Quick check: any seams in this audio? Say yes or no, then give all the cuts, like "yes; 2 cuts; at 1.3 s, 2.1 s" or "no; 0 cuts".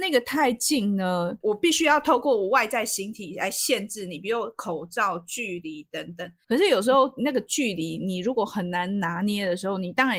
yes; 2 cuts; at 1.4 s, 6.4 s